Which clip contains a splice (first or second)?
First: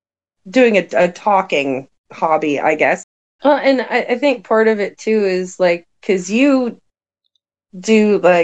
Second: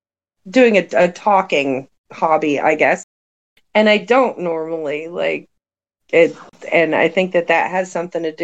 first